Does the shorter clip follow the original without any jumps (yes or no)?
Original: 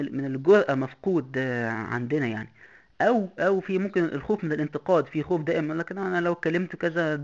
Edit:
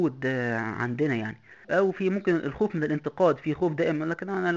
no